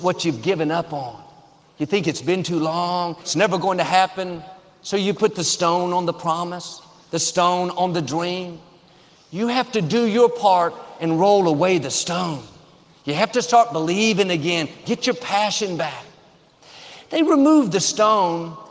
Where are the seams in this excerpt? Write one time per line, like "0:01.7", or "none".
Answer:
0:03.2